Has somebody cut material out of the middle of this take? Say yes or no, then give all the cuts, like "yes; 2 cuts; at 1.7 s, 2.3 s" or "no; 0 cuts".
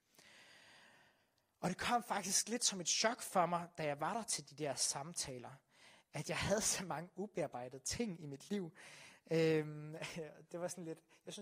no; 0 cuts